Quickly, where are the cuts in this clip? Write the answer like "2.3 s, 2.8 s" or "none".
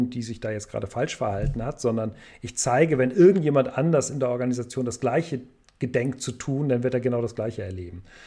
none

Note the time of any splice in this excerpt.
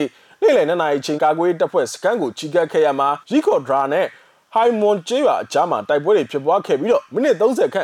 1.2 s, 3.2 s

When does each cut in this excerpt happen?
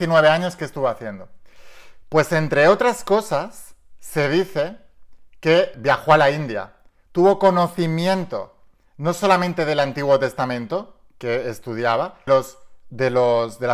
5.7 s, 12.3 s

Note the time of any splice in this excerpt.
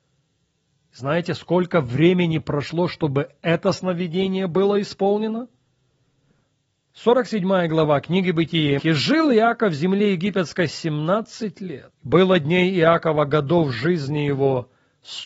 8.8 s, 12.0 s

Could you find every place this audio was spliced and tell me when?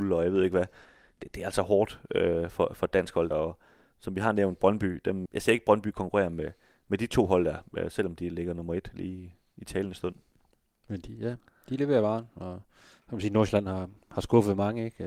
3.3 s, 5.3 s

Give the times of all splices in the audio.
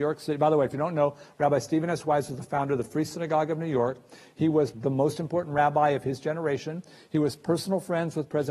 4.7 s

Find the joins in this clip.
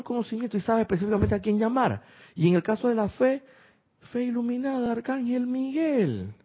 none

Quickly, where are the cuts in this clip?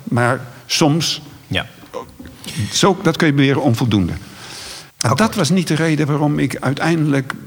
4.9 s

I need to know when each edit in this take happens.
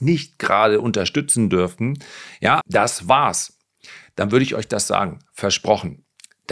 2.6 s

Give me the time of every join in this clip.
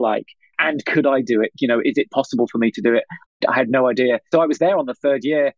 4.3 s

